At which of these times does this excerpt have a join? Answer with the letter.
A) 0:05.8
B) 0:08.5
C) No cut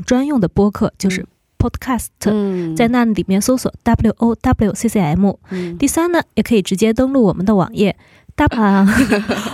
B